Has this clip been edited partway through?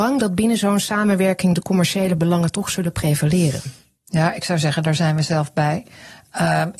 no; 0 cuts

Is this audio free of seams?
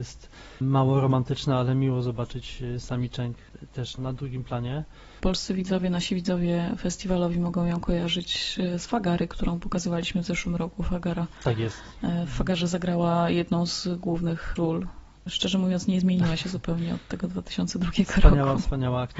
no; 1 cut; at 4.0 s

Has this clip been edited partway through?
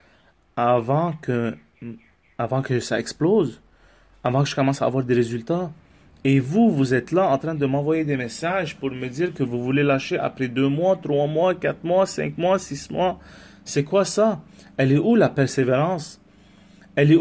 no; 0 cuts

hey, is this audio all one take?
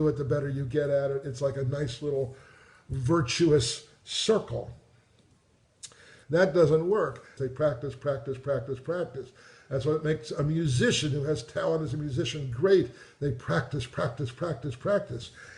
no; 2 cuts; at 6.2 s, 7.4 s

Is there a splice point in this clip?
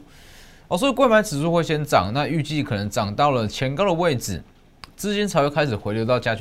no; 0 cuts

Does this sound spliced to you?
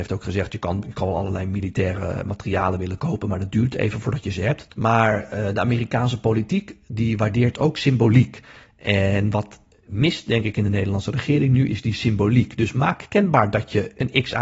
yes; 1 cut; at 4.7 s

